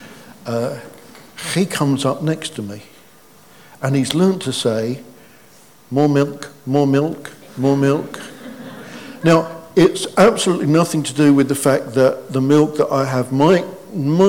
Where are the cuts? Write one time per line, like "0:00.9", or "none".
none